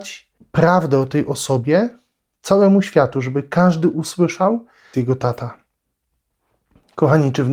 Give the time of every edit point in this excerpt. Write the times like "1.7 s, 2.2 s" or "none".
4.9 s

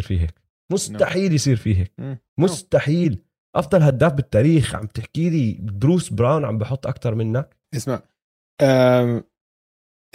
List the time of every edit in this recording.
2.3 s, 7.6 s

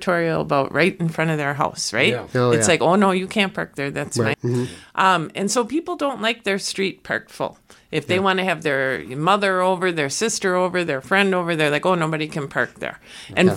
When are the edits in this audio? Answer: 4.3 s

